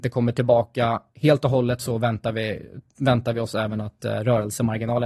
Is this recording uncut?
yes; 0 cuts

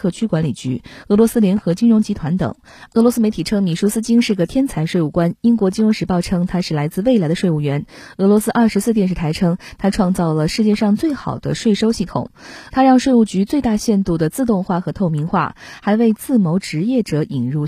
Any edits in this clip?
yes; 2 cuts; at 2.9 s, 12.7 s

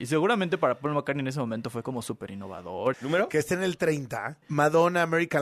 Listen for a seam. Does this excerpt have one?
yes; 2 cuts; at 2.9 s, 4.4 s

